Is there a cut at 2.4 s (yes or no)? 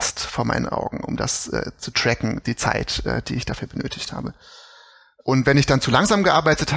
yes